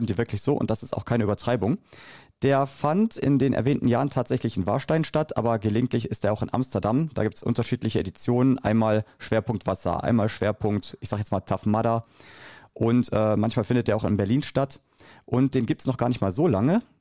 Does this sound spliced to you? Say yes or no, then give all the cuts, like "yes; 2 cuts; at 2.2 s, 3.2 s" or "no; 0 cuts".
no; 0 cuts